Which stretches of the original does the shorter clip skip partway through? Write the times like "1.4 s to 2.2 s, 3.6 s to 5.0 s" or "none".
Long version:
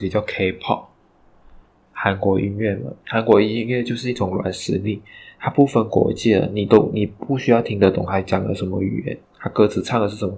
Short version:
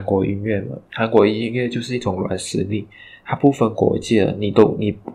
none